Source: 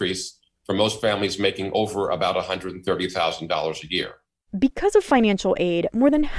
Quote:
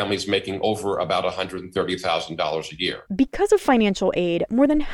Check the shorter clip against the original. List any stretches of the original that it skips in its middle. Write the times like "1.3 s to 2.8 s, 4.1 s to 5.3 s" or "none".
4.2 s to 4.5 s